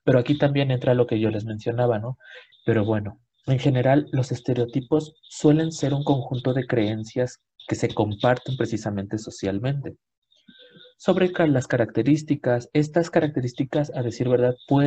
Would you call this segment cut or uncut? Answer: cut